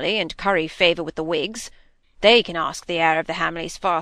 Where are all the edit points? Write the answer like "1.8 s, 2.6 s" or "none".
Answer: 2.0 s